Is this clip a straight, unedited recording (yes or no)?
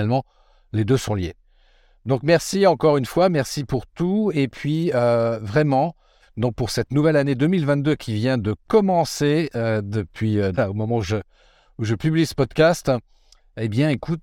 no